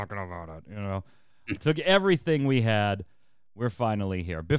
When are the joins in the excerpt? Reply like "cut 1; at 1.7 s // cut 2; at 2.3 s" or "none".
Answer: cut 1; at 1.6 s